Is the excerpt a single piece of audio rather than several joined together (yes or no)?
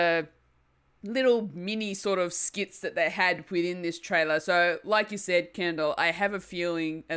yes